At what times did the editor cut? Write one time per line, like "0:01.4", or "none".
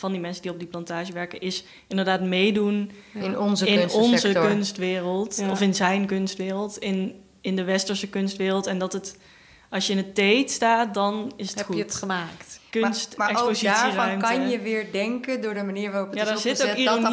0:12.6